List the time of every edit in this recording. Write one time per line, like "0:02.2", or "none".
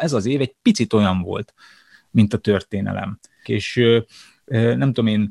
0:03.5